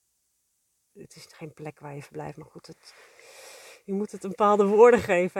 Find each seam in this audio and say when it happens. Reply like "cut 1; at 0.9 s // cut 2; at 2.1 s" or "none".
cut 1; at 0.9 s